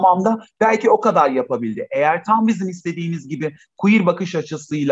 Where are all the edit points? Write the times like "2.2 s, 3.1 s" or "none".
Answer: none